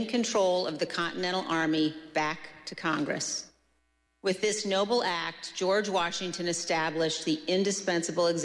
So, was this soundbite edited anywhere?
yes; 1 cut; at 4.1 s

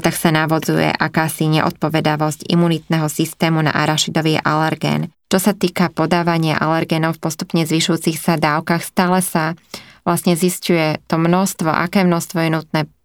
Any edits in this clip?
no; 0 cuts

